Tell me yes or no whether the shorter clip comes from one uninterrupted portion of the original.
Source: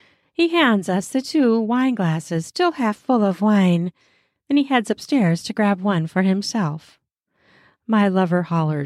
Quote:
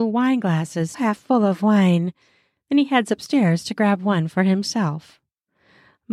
no